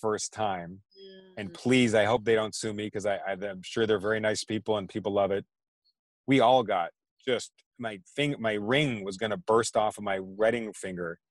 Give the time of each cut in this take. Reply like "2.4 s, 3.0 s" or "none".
none